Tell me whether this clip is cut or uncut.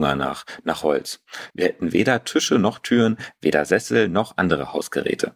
cut